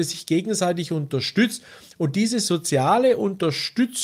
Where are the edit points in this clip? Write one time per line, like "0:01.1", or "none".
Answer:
none